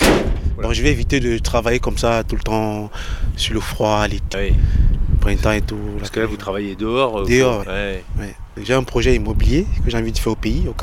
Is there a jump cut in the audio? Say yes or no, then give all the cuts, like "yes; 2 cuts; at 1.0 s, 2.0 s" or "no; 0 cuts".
yes; 2 cuts; at 4.3 s, 7.6 s